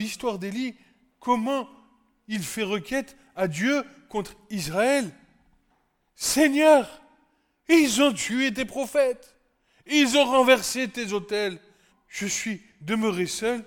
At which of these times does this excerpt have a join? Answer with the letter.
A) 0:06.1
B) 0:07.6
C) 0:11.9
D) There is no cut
C